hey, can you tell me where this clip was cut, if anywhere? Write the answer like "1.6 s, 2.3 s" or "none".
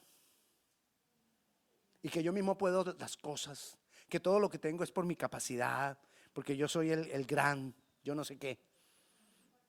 none